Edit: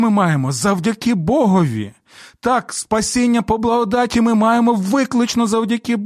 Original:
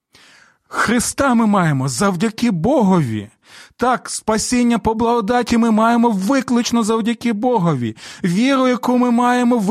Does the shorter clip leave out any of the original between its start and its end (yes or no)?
no